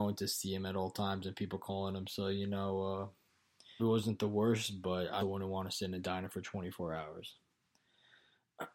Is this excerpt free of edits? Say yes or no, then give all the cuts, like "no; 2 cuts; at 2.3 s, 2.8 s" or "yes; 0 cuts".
no; 2 cuts; at 3.8 s, 5.2 s